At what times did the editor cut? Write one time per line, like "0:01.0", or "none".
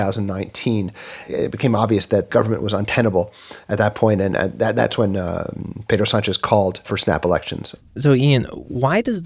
none